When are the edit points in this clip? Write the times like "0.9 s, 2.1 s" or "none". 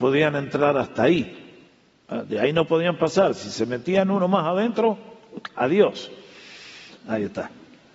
5.6 s, 7.0 s